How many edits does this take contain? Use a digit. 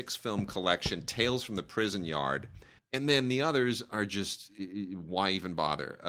1